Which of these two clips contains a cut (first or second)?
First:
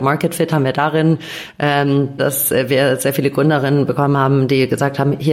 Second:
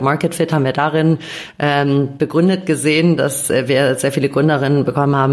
first